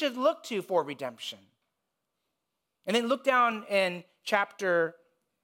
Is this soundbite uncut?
yes; 0 cuts

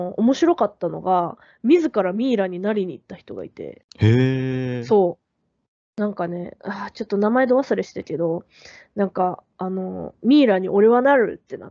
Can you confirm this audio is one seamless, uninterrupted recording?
no; 2 cuts; at 6.6 s, 9.5 s

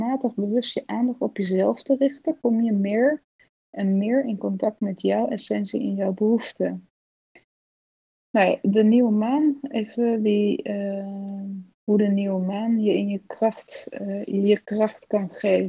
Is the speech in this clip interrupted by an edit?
no; 0 cuts

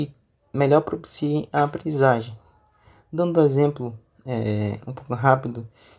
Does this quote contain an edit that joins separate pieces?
no; 0 cuts

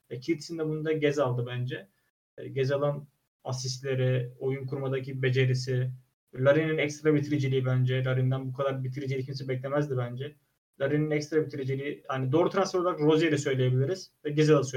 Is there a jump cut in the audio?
no; 0 cuts

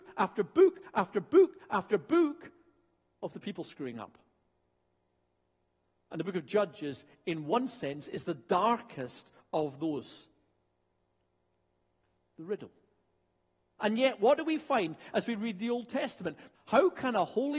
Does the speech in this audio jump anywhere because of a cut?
yes; 2 cuts; at 13.8 s, 16.5 s

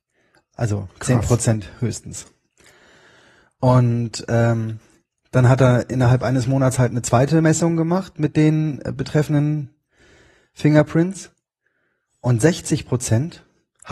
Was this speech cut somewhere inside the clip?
no; 0 cuts

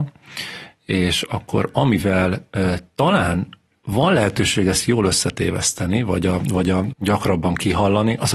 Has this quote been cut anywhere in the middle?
yes; 1 cut; at 6.9 s

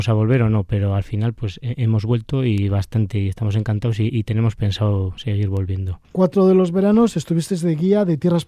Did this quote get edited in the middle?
yes; 2 cuts; at 4.1 s, 6.0 s

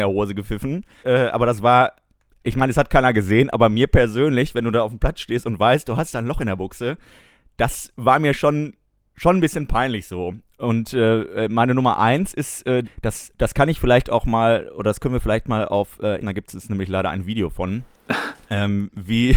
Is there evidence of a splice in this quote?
yes; 3 cuts; at 1.0 s, 12.8 s, 16.2 s

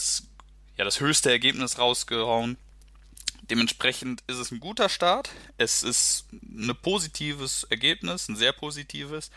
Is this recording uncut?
yes; 0 cuts

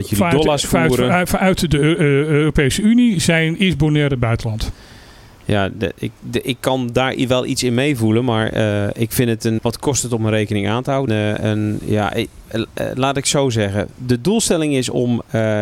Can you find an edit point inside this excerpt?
yes; 2 cuts; at 9.6 s, 11.1 s

